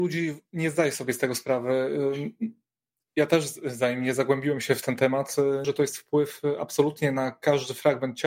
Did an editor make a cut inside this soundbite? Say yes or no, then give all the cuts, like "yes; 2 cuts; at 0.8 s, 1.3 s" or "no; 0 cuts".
yes; 1 cut; at 5.6 s